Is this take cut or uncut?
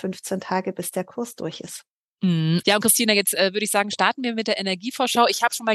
cut